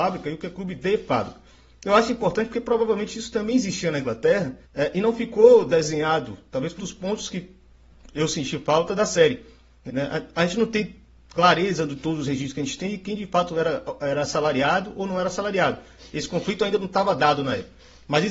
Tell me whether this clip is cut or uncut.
cut